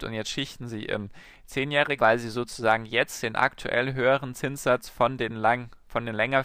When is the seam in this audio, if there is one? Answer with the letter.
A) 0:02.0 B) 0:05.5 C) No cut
A